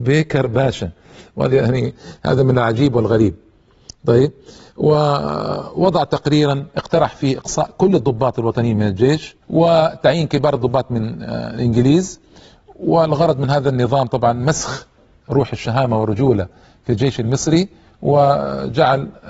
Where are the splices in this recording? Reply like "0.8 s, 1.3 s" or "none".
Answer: 9.4 s